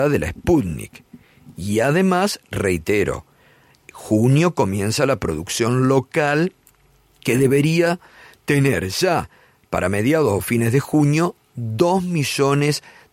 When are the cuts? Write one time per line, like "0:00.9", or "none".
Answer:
none